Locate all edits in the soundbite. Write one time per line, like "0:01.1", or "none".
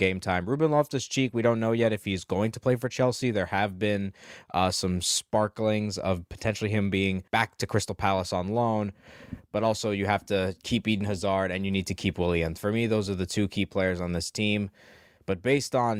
0:07.3

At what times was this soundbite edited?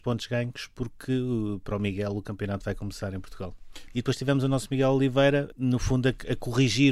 0:03.9
0:05.5

